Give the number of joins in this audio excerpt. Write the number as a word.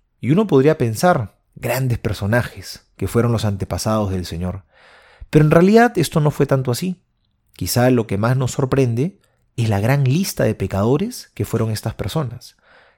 zero